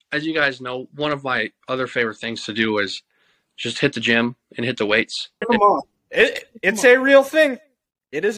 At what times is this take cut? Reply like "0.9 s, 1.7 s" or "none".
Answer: 5.4 s